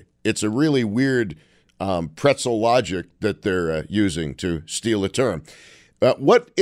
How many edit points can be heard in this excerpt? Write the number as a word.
zero